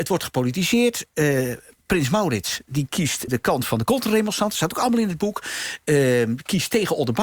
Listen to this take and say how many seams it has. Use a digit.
1